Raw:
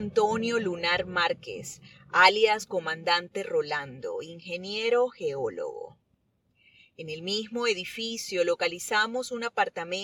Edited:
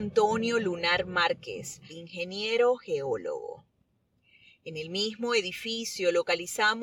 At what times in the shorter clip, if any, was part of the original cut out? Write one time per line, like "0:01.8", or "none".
0:01.9